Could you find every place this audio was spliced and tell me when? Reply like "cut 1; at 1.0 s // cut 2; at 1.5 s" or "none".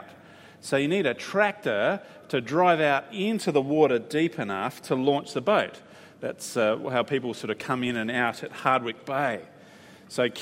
none